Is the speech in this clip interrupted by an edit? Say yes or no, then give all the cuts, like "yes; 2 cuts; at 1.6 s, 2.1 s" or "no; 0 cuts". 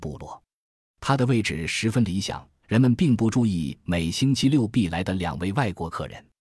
yes; 1 cut; at 2.6 s